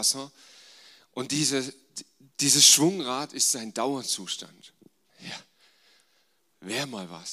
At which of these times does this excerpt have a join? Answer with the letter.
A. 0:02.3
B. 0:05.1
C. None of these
B